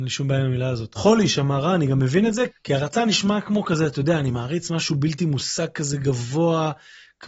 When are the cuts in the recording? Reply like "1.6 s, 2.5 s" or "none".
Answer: 1.0 s, 2.5 s